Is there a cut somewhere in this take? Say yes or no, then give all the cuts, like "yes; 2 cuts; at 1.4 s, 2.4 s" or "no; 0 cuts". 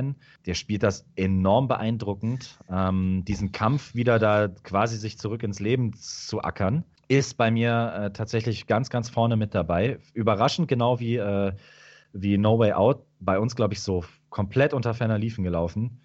no; 0 cuts